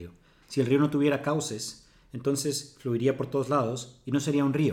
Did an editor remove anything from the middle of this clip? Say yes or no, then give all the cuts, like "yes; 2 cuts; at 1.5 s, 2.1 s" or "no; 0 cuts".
no; 0 cuts